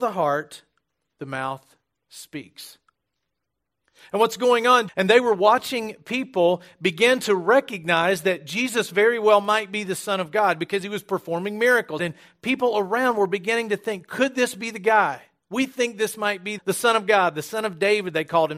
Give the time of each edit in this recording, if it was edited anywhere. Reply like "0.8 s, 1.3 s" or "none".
4.9 s, 12.0 s, 16.6 s